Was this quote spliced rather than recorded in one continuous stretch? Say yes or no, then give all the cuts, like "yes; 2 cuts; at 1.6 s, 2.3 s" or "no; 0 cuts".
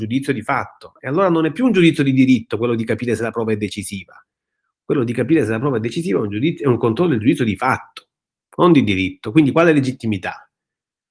no; 0 cuts